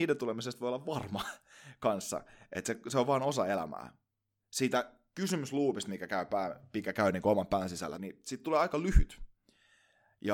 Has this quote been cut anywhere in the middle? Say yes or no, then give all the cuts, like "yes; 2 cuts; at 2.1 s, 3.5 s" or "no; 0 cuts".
yes; 2 cuts; at 4.4 s, 8.0 s